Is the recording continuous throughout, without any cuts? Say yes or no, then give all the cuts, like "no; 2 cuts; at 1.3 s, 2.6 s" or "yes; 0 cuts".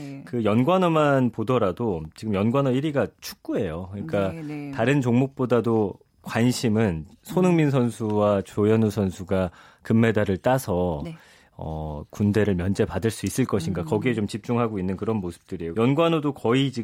no; 1 cut; at 15.7 s